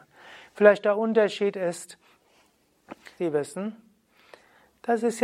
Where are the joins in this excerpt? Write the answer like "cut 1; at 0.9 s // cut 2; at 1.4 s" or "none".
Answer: cut 1; at 3.2 s